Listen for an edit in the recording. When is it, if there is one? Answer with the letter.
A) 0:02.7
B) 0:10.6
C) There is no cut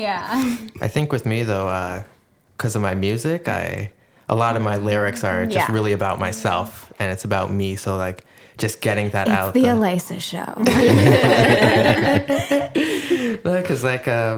C